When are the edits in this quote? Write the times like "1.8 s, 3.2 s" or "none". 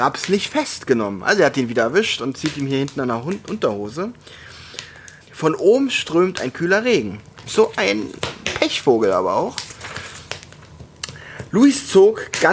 5.2 s, 7.5 s, 11.5 s